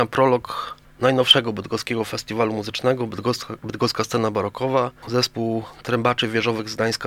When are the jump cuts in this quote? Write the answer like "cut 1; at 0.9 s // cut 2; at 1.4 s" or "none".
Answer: cut 1; at 5.0 s